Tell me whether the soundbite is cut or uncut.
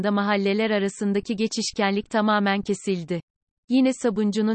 cut